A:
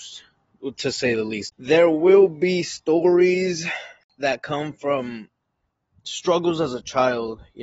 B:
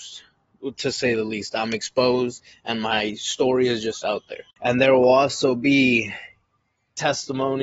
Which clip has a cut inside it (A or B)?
A